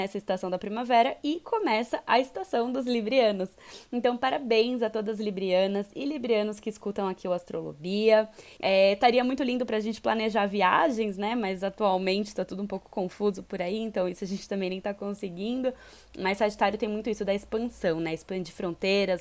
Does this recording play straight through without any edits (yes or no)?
no